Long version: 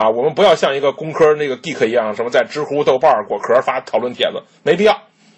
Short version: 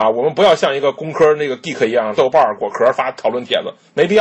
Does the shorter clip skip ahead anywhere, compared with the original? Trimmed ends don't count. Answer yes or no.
yes